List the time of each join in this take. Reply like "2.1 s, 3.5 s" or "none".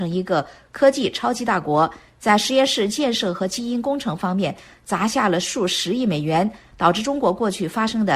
6.7 s